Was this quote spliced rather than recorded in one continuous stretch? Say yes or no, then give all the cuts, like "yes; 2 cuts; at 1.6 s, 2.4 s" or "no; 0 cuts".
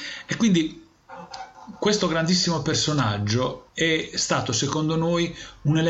yes; 1 cut; at 3.7 s